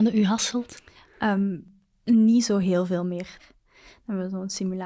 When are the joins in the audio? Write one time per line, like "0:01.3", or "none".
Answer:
0:03.4